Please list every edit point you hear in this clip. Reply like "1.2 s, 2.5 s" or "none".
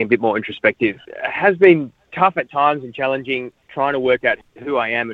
1.0 s, 3.6 s